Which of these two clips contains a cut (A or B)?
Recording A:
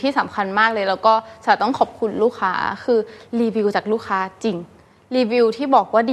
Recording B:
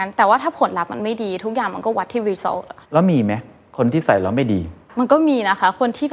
B